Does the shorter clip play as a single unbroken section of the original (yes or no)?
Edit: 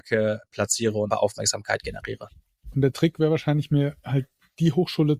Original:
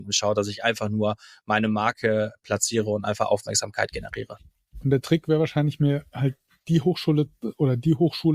no